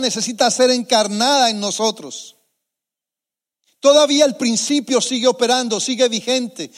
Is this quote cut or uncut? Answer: uncut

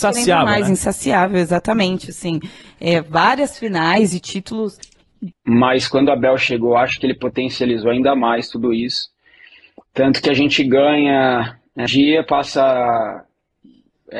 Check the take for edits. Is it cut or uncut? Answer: cut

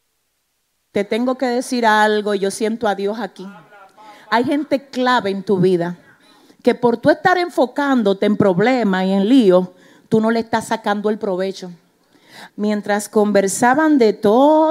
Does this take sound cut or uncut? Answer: cut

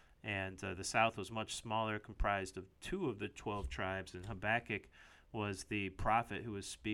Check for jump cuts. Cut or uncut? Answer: uncut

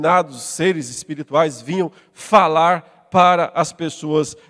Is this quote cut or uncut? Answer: uncut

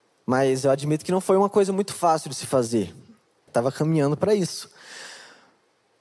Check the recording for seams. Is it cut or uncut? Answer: cut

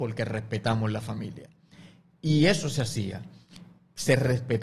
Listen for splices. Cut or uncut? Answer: uncut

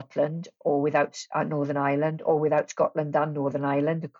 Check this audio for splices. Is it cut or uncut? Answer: uncut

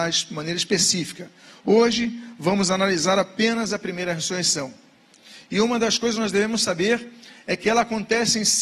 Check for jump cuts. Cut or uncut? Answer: uncut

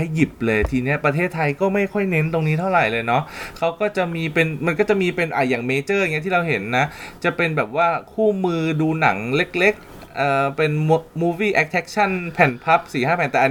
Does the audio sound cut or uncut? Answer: uncut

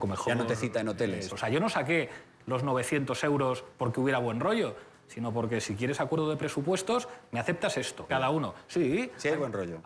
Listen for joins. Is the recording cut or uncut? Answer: cut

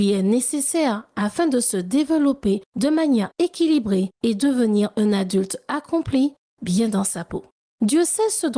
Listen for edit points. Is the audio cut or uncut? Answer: uncut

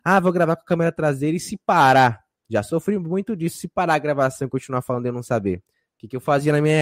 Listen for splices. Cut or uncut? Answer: uncut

